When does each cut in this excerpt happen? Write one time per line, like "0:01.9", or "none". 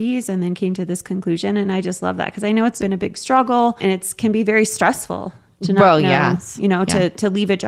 none